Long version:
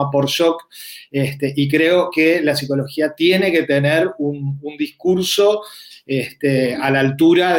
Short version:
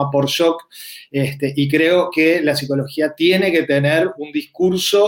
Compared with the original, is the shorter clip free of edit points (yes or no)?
no